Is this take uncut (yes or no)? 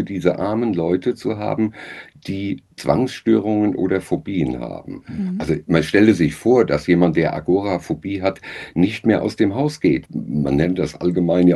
no